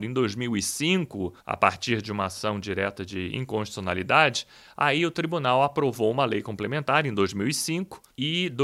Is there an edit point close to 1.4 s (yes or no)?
yes